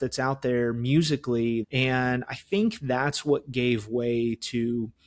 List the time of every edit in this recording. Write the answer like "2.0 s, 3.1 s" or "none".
1.6 s